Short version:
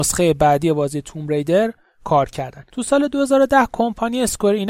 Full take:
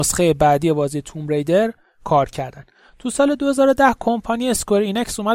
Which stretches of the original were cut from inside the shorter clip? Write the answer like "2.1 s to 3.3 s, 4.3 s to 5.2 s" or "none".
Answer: 2.7 s to 3.0 s